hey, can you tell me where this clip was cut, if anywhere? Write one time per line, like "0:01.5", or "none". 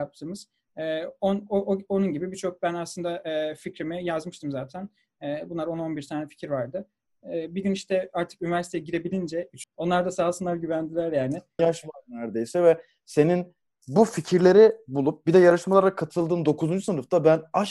0:09.6
0:11.6